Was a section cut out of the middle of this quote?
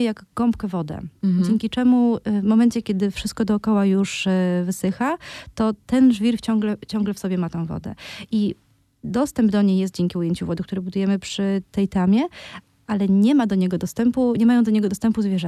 no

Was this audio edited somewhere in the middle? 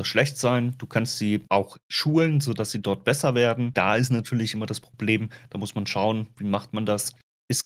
yes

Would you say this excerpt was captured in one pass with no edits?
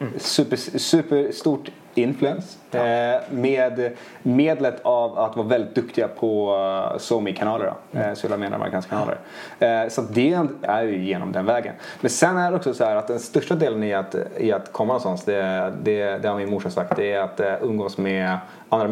no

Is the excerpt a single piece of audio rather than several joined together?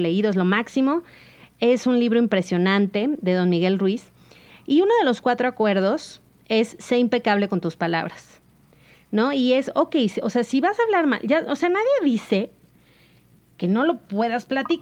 yes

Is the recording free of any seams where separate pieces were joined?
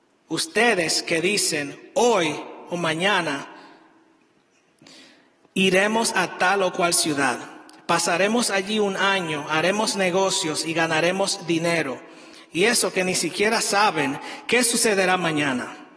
yes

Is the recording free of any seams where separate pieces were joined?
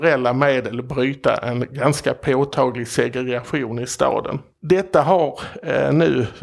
no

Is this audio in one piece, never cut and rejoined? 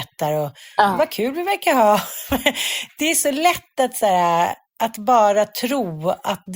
yes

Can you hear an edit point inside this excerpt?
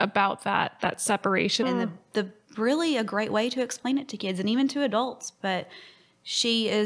yes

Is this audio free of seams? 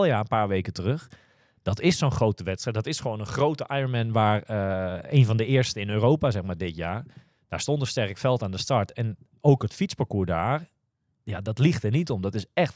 yes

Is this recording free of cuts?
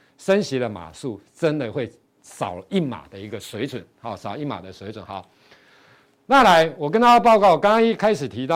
yes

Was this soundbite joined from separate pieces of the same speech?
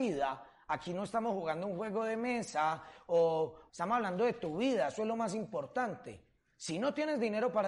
yes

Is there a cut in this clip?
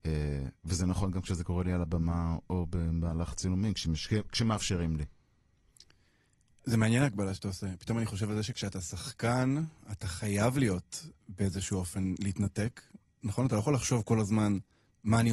no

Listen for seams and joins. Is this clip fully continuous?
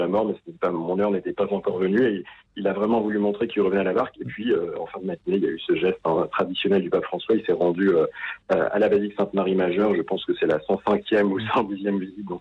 yes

